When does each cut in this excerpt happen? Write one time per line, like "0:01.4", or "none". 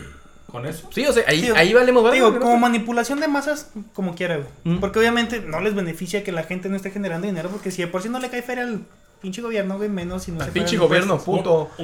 none